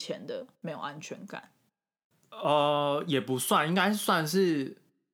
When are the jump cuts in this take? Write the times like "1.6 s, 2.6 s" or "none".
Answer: none